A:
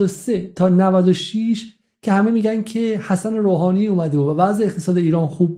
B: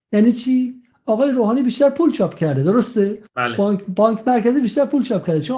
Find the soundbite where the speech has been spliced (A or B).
B